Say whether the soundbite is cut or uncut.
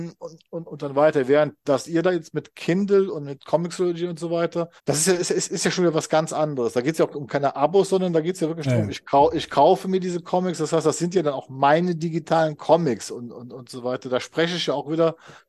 cut